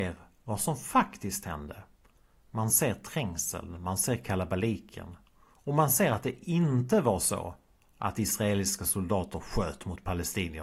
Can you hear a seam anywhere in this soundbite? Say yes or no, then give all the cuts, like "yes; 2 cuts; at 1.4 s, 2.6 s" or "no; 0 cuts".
no; 0 cuts